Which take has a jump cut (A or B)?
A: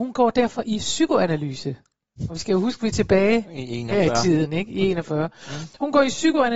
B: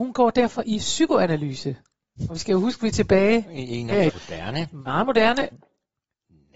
B